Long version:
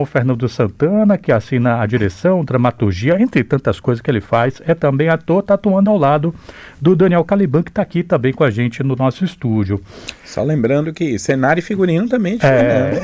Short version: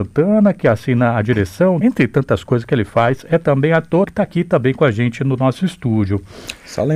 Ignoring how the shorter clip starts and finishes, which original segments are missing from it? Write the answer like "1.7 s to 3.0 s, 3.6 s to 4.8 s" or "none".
2.5 s to 3.2 s, 5.4 s to 7.6 s